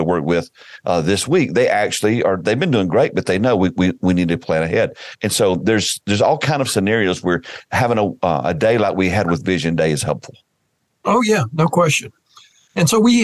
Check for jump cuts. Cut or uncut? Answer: uncut